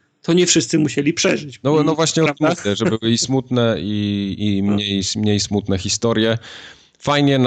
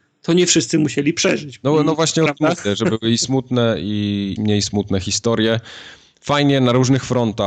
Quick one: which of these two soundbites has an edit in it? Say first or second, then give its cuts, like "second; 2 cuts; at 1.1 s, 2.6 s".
second; 1 cut; at 4.4 s